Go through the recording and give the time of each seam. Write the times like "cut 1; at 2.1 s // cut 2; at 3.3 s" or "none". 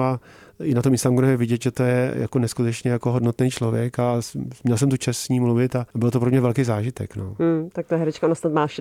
cut 1; at 5.9 s